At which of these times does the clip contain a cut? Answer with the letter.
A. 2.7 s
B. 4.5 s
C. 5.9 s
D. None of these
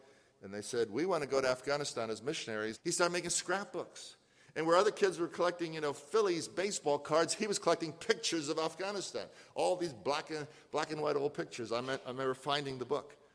A